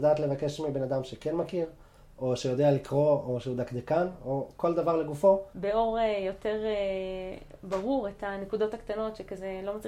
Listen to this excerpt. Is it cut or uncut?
cut